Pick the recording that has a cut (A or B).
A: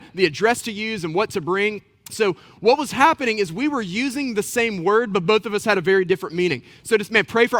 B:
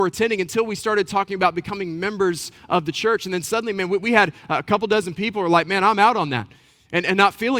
A